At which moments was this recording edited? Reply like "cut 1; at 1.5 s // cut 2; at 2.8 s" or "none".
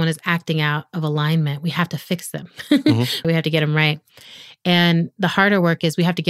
cut 1; at 3.2 s